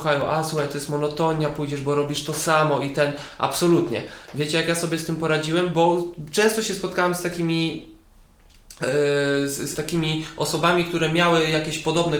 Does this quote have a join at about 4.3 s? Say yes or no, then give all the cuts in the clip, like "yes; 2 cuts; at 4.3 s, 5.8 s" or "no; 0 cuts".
no; 1 cut; at 9.7 s